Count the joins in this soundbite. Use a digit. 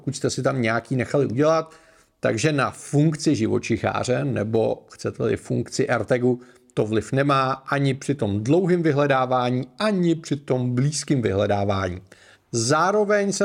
1